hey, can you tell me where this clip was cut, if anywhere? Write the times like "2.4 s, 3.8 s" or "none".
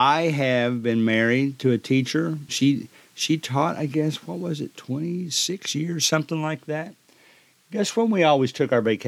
2.5 s